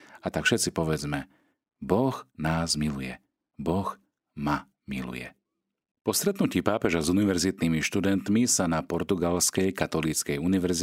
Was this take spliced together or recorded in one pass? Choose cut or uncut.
cut